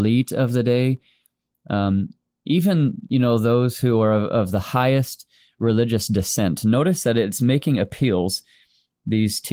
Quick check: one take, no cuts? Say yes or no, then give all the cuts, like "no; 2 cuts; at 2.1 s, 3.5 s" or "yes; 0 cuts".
yes; 0 cuts